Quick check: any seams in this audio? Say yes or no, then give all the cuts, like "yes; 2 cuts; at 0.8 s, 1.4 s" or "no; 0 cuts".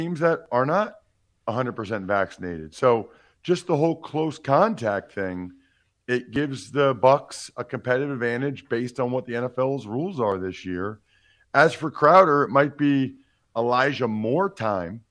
no; 0 cuts